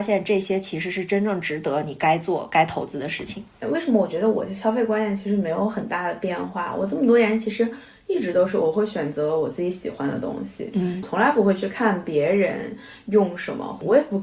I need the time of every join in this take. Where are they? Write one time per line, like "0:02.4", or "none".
0:03.6